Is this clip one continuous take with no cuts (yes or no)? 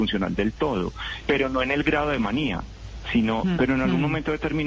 no